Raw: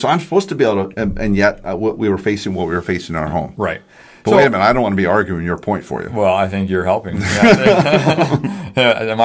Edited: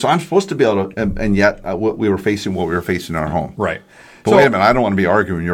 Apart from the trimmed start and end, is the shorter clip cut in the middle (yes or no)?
no